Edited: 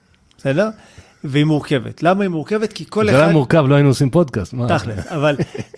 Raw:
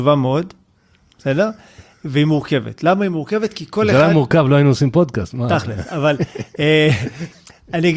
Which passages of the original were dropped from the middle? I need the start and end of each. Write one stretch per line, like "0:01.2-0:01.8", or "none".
none